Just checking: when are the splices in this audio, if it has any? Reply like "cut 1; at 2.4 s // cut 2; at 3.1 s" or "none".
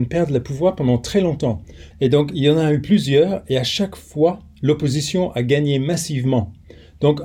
cut 1; at 1.9 s